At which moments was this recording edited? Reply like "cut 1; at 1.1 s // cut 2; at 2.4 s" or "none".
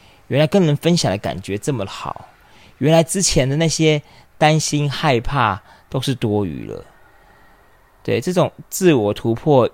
none